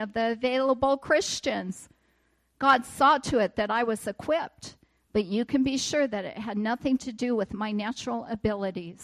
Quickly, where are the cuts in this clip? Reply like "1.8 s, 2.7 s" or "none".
none